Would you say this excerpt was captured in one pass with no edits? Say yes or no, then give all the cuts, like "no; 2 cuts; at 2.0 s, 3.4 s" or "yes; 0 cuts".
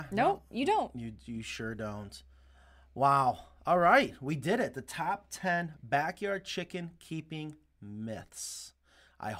yes; 0 cuts